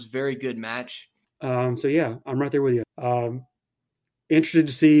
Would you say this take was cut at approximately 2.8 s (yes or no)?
yes